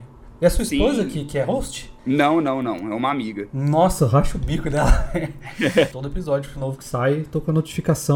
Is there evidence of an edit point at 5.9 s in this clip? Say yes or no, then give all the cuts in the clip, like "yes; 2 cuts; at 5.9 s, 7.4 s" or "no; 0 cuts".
yes; 2 cuts; at 2.0 s, 5.9 s